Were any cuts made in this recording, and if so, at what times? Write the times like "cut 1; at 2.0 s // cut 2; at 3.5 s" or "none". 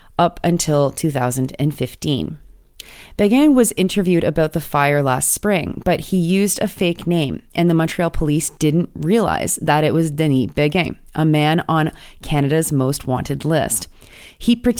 none